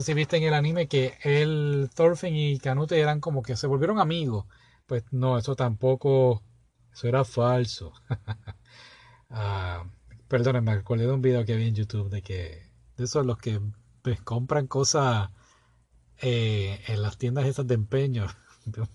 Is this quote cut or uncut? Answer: uncut